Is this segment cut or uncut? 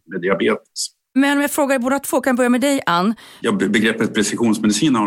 cut